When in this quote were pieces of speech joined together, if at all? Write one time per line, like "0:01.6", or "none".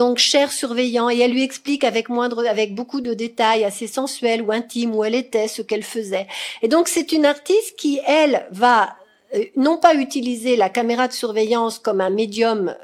none